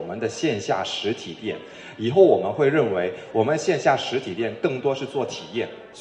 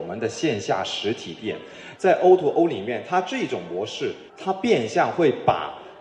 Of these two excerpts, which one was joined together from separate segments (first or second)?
second